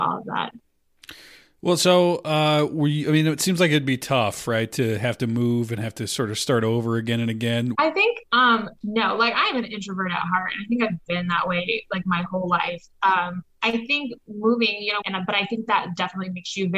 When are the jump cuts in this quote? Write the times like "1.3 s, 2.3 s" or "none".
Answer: 7.7 s, 15.0 s